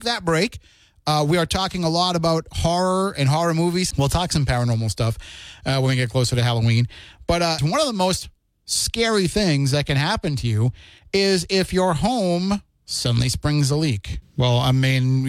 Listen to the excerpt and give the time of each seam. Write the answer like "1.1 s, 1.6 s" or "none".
3.9 s, 7.6 s, 14.2 s